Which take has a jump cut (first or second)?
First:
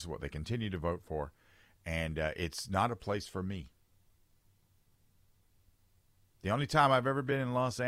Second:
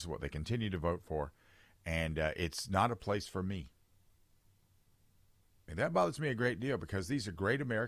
second